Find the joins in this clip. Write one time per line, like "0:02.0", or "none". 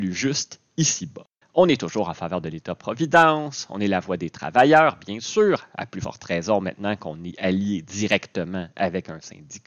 0:01.4